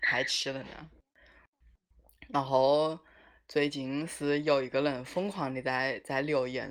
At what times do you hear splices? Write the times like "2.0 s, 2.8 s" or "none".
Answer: none